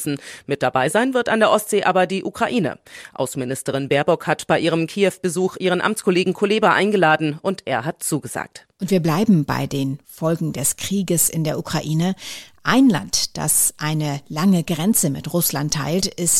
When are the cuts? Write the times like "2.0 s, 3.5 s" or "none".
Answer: none